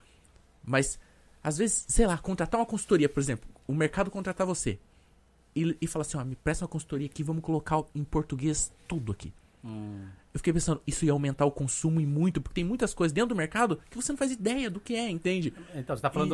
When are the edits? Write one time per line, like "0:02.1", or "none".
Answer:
none